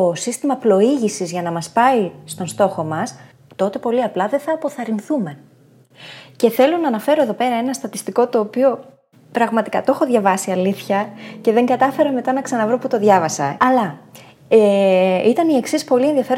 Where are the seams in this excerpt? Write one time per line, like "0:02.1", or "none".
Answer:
0:13.6